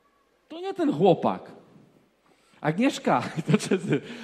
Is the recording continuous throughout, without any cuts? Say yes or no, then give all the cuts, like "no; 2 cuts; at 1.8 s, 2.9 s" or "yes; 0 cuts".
yes; 0 cuts